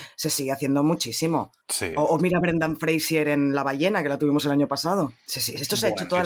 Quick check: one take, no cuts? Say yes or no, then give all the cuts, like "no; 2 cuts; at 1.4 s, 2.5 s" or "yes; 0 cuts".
yes; 0 cuts